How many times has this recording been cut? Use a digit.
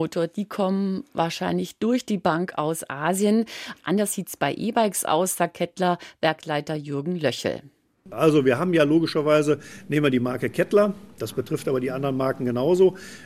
1